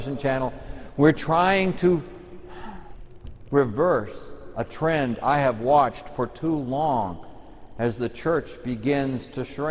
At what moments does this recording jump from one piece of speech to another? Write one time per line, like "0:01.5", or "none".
none